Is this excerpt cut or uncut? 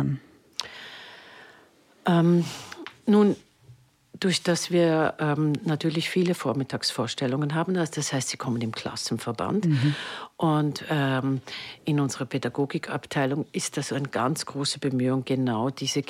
uncut